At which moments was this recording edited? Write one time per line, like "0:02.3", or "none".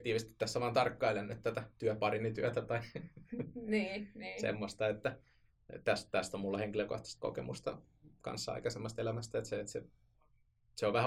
none